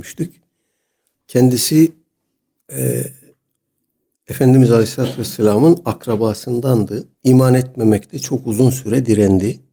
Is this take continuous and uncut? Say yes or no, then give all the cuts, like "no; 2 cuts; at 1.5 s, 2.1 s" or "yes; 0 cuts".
no; 2 cuts; at 1.1 s, 7.1 s